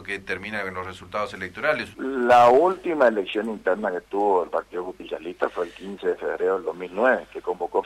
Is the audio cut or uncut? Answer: cut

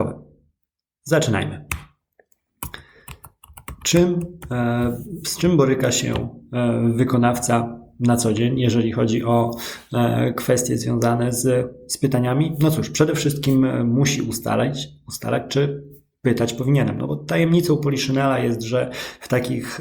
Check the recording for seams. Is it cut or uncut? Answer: uncut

